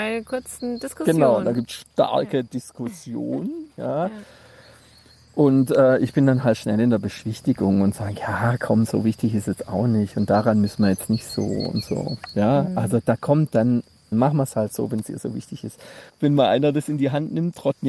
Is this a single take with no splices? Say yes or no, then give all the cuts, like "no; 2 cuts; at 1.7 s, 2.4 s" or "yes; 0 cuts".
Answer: no; 2 cuts; at 14.1 s, 16.1 s